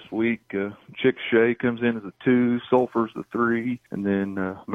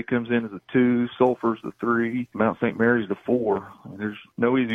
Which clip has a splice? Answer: second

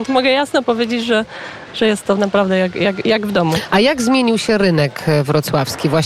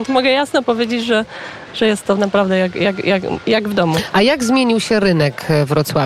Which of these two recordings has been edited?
first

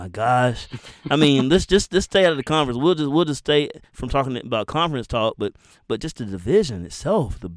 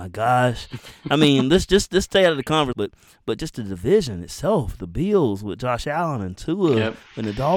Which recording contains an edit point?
second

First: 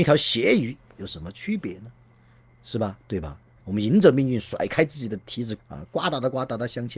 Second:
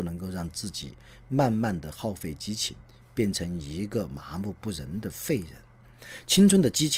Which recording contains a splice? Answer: first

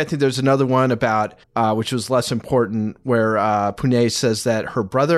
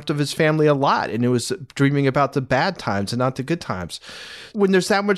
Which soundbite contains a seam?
first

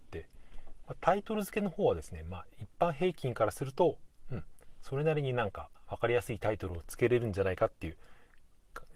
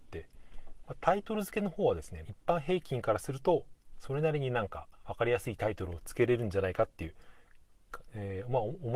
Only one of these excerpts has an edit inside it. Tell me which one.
second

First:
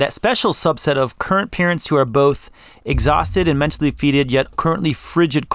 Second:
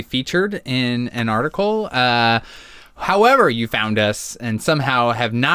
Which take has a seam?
first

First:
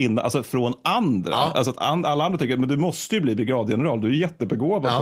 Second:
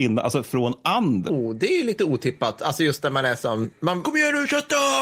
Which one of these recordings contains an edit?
second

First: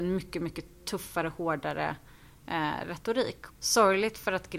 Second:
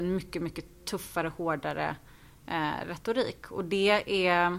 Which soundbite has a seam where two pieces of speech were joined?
first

